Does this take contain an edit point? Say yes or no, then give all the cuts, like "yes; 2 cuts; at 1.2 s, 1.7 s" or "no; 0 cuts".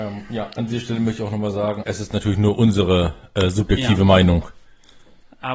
yes; 1 cut; at 1.8 s